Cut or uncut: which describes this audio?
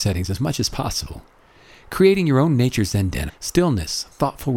cut